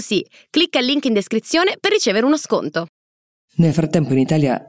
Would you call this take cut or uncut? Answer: uncut